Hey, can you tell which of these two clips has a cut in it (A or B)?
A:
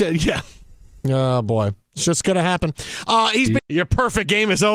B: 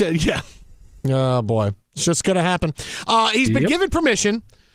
A